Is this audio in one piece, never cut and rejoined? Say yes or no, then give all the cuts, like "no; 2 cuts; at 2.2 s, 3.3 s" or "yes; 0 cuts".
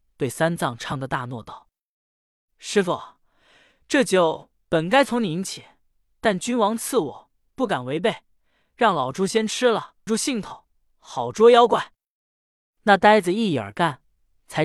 no; 1 cut; at 10.1 s